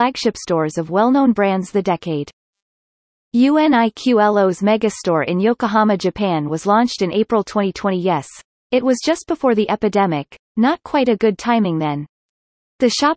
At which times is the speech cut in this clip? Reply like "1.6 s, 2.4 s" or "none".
none